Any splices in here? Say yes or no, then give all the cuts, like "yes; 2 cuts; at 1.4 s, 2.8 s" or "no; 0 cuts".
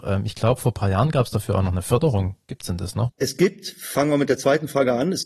yes; 1 cut; at 3.1 s